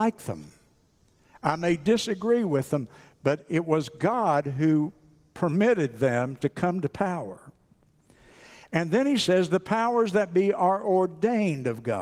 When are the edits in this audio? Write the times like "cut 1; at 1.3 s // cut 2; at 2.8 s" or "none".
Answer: none

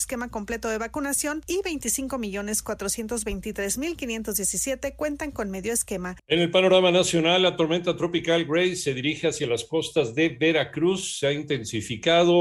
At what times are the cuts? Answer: cut 1; at 6.2 s

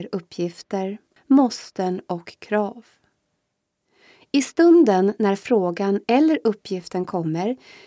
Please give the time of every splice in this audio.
cut 1; at 1.2 s

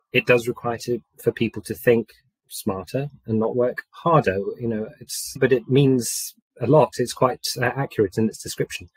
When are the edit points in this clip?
cut 1; at 5.4 s

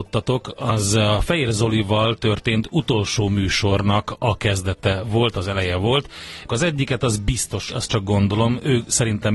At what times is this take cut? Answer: cut 1; at 6.5 s // cut 2; at 7.7 s

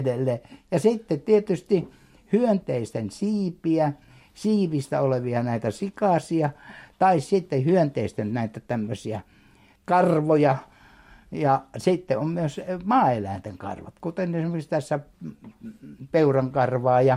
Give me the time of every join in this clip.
cut 1; at 9.8 s

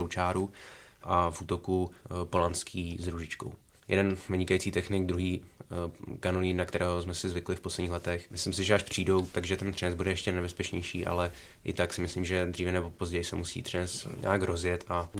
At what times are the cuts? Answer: none

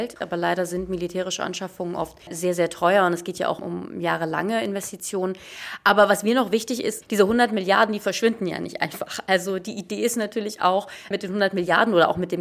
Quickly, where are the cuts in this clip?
cut 1; at 7.0 s

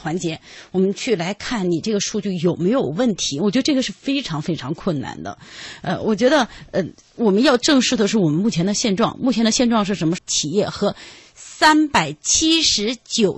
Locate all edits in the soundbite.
cut 1; at 10.2 s

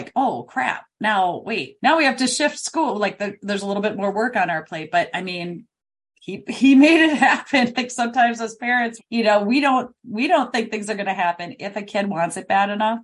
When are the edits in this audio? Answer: cut 1; at 7.7 s // cut 2; at 9.0 s

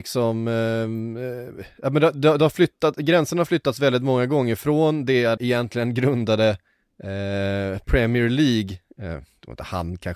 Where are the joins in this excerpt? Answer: cut 1; at 5.4 s

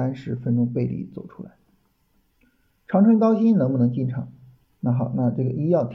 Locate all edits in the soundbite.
cut 1; at 4.7 s

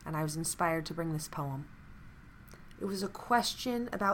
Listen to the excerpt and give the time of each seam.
cut 1; at 2.8 s

